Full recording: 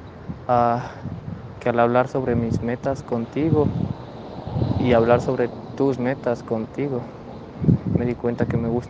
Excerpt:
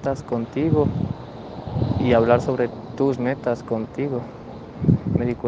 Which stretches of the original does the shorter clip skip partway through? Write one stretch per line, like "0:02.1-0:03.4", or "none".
none